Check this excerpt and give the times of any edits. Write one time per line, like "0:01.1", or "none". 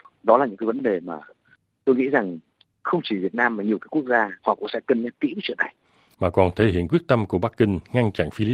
0:04.4
0:06.1